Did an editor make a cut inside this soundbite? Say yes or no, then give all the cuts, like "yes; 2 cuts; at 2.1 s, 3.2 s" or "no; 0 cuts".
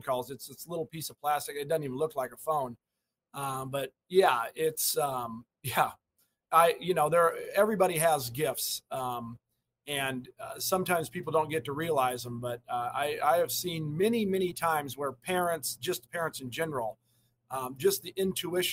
no; 0 cuts